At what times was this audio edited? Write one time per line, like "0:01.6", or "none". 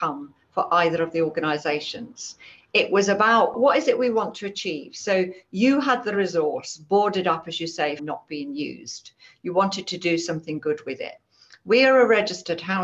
0:08.0